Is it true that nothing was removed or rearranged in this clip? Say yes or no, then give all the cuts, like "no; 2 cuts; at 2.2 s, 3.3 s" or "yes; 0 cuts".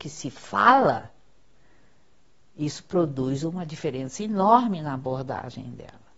yes; 0 cuts